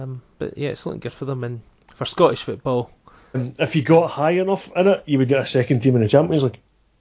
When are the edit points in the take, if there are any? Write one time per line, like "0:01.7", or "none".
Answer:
0:03.3
0:05.3